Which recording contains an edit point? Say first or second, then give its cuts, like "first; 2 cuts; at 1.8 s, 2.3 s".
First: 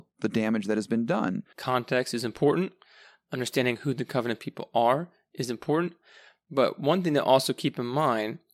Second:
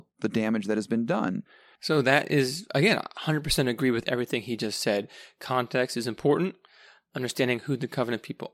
first; 1 cut; at 1.5 s